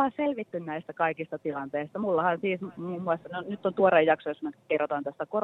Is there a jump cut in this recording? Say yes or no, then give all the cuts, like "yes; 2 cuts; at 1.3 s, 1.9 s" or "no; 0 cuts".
no; 0 cuts